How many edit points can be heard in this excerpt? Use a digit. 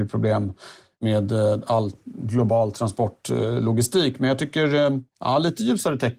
0